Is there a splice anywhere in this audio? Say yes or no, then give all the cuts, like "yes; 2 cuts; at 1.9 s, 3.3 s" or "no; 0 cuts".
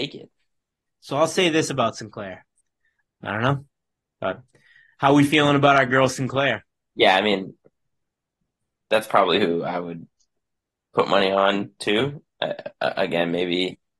yes; 1 cut; at 3.0 s